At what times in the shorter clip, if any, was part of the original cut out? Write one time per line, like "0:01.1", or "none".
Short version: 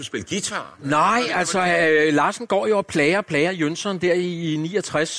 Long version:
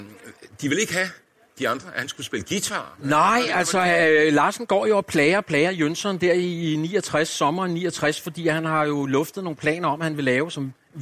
none

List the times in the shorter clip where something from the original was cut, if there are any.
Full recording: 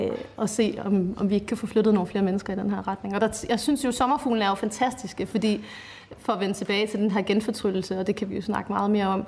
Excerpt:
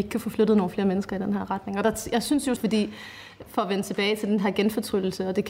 0:02.6

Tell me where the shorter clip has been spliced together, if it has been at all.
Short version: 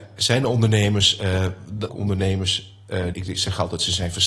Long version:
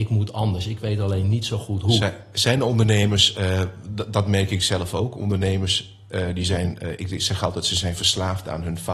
0:01.9
0:03.1

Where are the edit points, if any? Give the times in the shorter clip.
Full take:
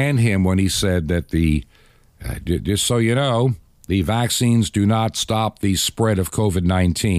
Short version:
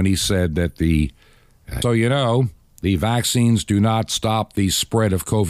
0:01.8

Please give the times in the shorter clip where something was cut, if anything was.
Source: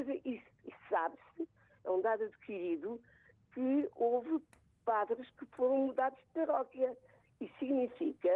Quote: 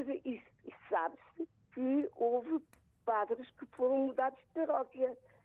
0:01.5

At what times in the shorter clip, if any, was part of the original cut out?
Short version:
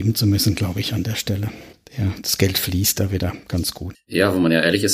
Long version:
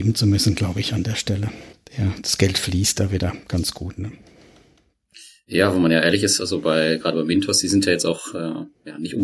0:03.9

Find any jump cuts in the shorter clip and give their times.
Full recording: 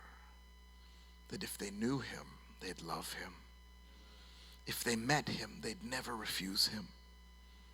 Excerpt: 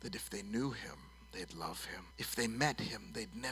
0:02.1

